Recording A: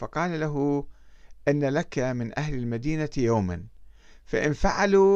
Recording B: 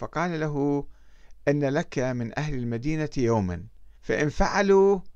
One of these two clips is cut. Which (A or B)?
B